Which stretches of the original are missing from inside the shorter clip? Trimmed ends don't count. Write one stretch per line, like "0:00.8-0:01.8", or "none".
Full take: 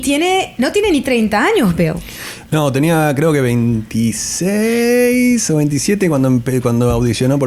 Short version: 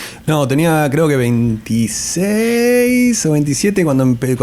none